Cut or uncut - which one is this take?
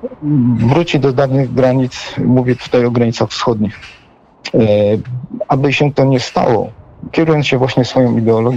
cut